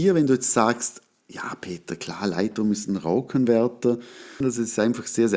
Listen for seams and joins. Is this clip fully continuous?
no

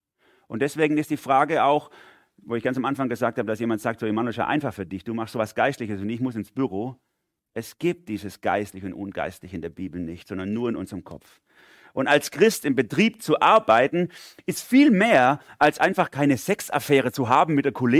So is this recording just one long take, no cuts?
no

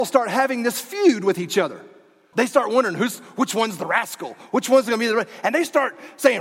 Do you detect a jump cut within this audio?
yes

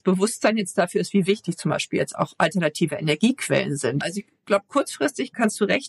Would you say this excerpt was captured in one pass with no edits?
no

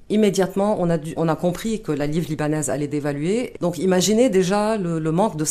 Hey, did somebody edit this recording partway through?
yes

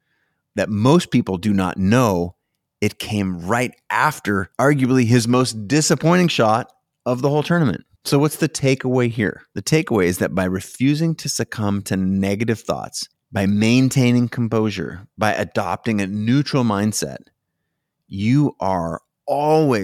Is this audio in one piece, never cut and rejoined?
yes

